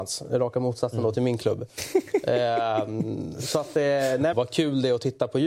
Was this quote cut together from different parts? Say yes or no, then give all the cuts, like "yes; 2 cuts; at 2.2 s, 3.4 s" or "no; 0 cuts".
yes; 1 cut; at 4.3 s